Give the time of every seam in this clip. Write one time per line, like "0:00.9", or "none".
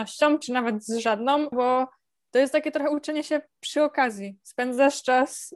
0:01.5